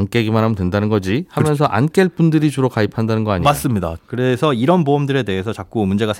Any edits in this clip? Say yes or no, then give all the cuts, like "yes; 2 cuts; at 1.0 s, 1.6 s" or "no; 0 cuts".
yes; 1 cut; at 4.0 s